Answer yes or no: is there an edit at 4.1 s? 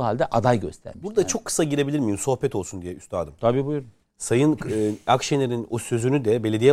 yes